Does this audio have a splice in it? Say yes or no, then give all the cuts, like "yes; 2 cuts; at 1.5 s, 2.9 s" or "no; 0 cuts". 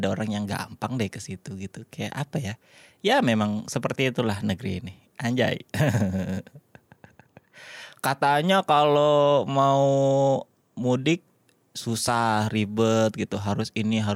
no; 0 cuts